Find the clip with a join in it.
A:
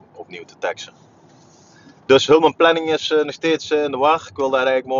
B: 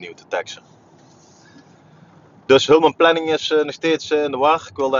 A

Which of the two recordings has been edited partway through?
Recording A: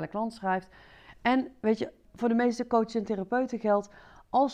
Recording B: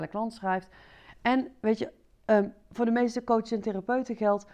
A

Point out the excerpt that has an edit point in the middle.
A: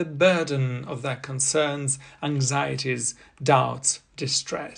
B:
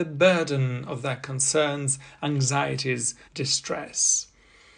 B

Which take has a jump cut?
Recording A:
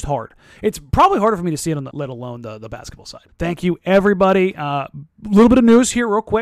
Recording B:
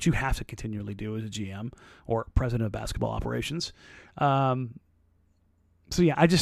A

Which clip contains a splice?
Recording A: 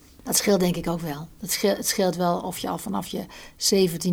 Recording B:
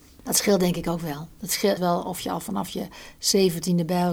B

